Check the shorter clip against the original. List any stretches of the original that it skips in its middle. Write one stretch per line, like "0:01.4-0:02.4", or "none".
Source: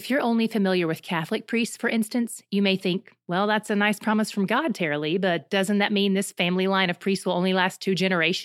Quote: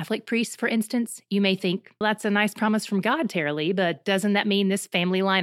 0:03.2-0:03.5